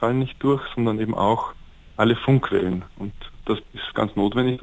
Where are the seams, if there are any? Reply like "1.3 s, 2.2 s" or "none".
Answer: none